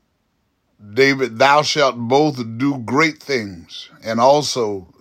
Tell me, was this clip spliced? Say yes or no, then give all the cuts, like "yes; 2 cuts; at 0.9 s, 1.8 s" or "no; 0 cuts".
no; 0 cuts